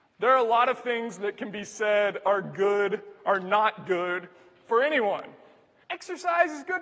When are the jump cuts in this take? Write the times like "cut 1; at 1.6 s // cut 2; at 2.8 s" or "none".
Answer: cut 1; at 5.8 s

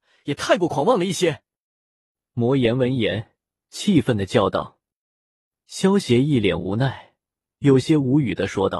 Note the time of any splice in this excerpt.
none

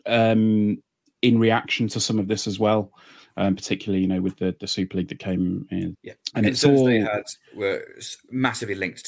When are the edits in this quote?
cut 1; at 5.9 s

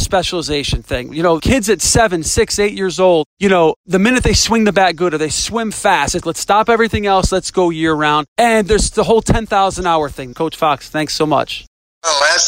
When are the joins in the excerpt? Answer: cut 1; at 6.2 s // cut 2; at 10.3 s

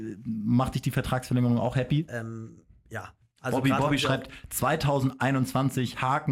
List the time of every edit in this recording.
cut 1; at 2.1 s

